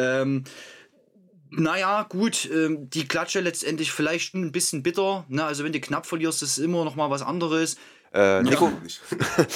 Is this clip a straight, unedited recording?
no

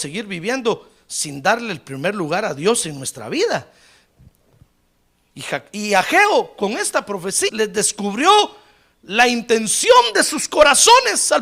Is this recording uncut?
no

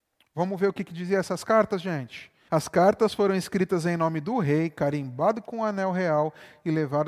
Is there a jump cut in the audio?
yes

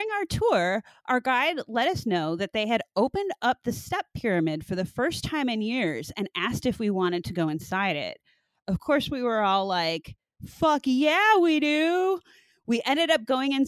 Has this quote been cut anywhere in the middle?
no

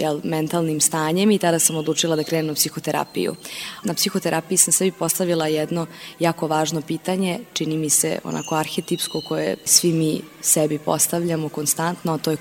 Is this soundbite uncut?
yes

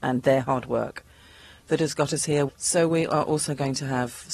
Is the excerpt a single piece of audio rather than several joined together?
no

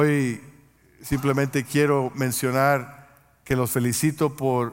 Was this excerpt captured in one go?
no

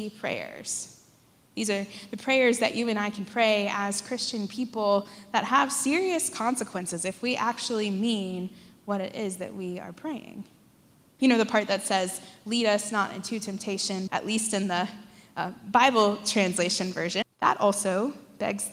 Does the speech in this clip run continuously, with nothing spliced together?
no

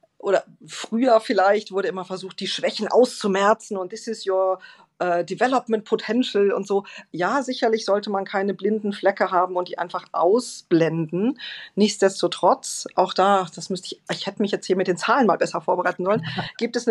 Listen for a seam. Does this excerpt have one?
no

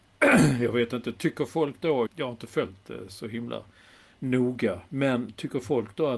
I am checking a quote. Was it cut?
yes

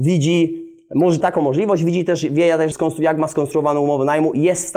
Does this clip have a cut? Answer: yes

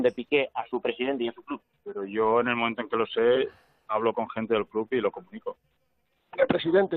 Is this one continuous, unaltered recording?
yes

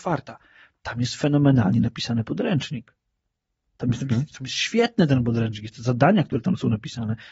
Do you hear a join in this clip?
no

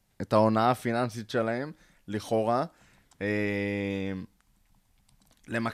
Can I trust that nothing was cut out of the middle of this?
yes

